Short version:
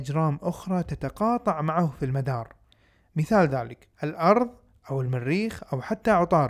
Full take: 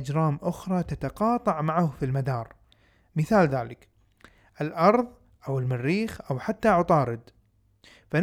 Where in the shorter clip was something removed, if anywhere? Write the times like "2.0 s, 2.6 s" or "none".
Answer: 3.9 s